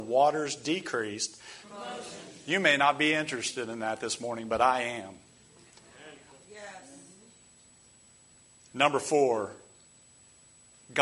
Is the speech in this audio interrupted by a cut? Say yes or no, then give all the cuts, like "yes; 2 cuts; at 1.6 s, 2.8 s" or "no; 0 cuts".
yes; 2 cuts; at 1.6 s, 6.3 s